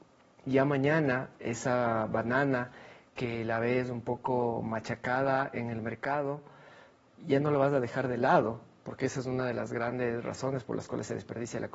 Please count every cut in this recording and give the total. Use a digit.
0